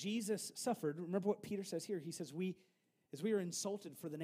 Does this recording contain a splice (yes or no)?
no